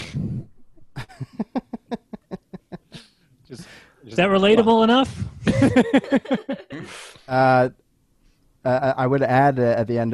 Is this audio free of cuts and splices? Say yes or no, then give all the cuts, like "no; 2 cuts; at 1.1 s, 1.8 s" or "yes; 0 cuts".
yes; 0 cuts